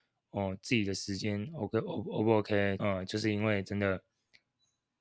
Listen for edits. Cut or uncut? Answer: cut